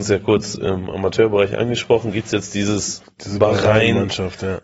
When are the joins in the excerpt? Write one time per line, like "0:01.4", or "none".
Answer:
none